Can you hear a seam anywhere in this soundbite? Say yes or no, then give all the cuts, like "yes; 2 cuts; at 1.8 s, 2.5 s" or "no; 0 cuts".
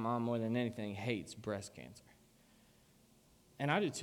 no; 0 cuts